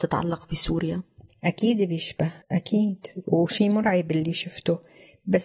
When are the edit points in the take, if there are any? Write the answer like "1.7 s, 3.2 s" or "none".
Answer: 2.4 s